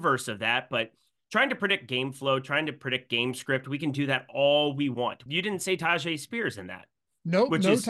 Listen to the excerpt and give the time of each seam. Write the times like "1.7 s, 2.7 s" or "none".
5.3 s